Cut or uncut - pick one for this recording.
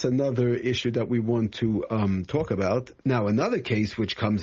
cut